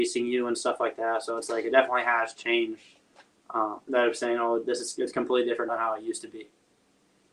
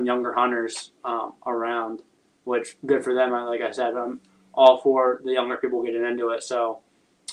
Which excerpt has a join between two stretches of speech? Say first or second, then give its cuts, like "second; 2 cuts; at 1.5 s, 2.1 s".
first; 2 cuts; at 3.9 s, 5.7 s